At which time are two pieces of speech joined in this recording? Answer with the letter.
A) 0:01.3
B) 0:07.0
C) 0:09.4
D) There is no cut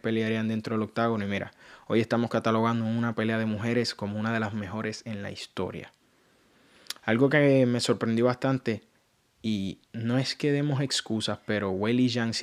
D